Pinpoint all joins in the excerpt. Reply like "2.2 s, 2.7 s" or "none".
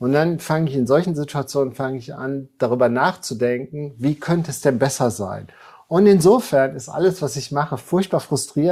none